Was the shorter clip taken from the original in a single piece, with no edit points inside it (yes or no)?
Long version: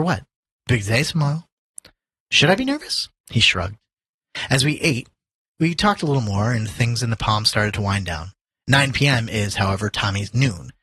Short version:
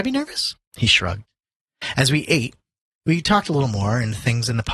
yes